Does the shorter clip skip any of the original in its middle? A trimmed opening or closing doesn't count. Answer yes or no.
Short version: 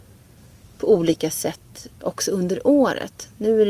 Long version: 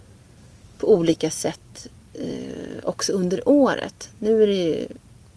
yes